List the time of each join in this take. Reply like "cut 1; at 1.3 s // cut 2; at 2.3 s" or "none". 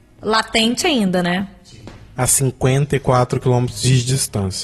cut 1; at 2.2 s